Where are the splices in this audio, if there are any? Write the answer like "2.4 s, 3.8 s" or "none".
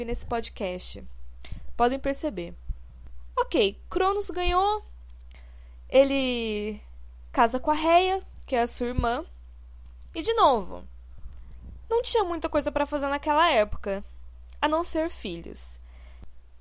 10.1 s

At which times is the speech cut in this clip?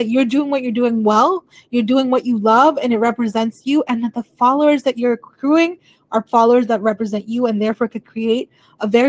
none

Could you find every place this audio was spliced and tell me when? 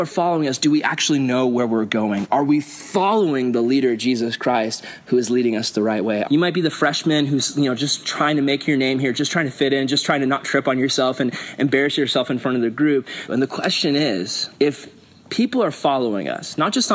6.2 s, 13.3 s, 14.5 s

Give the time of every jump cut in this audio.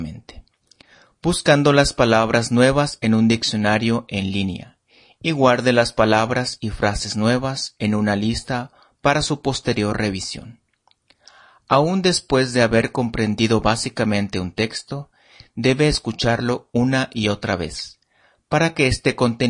none

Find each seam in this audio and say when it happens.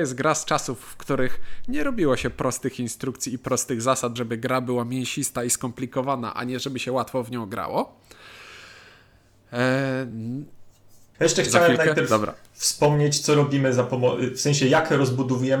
4.2 s, 11.1 s

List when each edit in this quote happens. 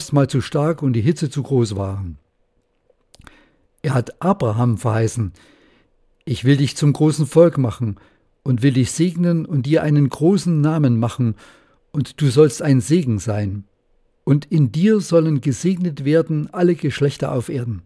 14.1 s

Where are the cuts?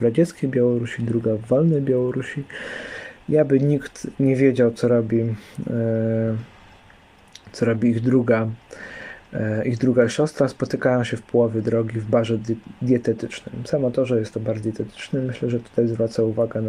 none

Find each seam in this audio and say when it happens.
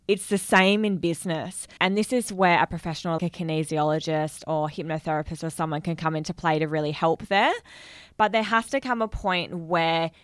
1.8 s, 3.2 s

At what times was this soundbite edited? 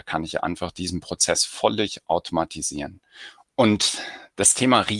3.4 s

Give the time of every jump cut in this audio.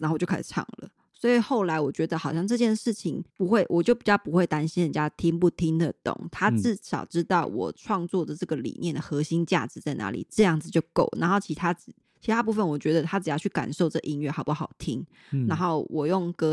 3.3 s

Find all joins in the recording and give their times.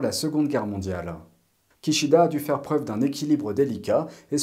1.7 s

